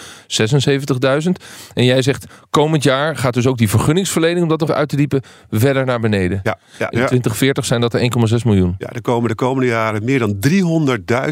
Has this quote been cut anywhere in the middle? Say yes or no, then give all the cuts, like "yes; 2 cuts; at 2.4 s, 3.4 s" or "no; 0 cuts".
yes; 2 cuts; at 4.7 s, 6.9 s